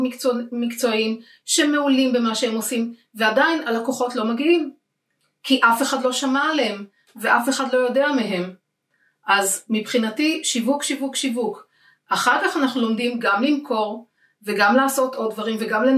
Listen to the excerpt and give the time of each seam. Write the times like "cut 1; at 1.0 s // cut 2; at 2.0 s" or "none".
none